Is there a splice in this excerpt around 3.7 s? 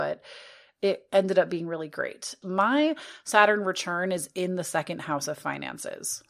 no; 1 cut; at 2.4 s

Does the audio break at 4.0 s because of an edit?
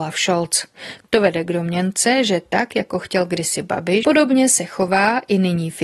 yes; 1 cut; at 4.0 s

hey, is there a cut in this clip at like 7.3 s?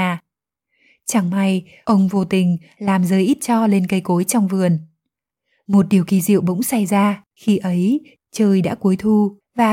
yes; 1 cut; at 7.3 s

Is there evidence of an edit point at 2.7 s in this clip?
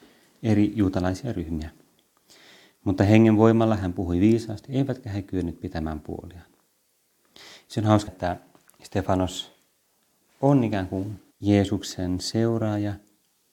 no; 2 cuts; at 8.1 s, 11.3 s

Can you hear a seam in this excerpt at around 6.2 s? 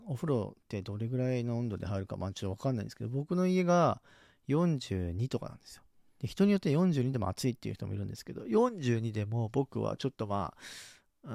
yes; 1 cut; at 6.2 s

